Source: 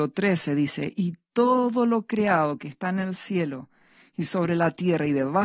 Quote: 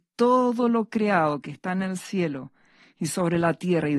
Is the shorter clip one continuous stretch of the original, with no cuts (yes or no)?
yes